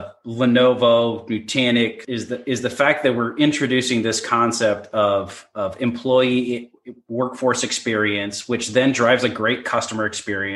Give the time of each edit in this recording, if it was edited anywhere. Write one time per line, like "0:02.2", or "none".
0:02.0